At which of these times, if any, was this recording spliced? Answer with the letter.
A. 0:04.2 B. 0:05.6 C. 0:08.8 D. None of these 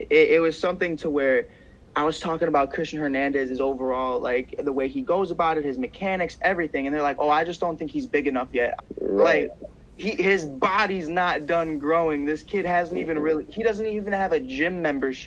C